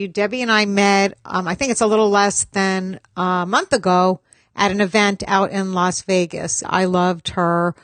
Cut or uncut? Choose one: cut